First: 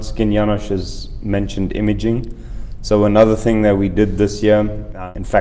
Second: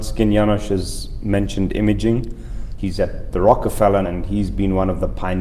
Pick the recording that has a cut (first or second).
second